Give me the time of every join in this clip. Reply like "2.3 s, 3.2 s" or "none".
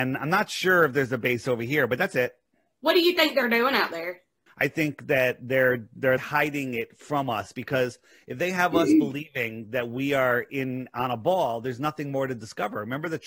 4.5 s, 6.2 s